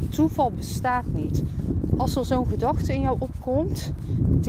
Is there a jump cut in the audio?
no; 0 cuts

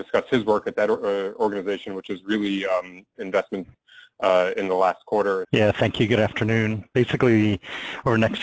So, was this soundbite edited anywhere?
yes; 3 cuts; at 3.1 s, 5.4 s, 6.9 s

